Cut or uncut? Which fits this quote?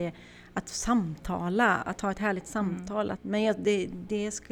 cut